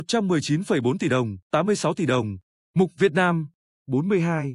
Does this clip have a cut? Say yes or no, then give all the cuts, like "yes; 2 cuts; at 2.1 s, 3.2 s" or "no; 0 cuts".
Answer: yes; 1 cut; at 1.4 s